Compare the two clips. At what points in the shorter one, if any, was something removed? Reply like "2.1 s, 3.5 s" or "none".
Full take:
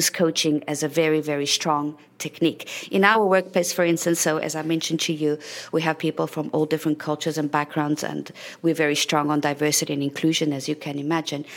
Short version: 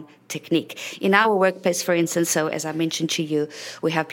none